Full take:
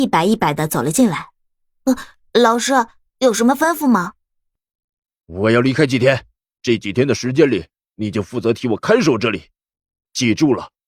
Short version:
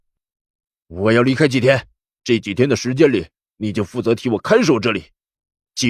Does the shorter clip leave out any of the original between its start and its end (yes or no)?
no